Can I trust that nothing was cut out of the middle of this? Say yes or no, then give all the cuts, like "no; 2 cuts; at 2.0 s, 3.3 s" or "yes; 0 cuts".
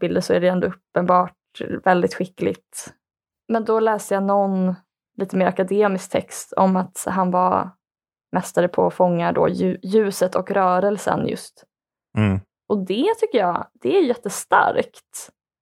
yes; 0 cuts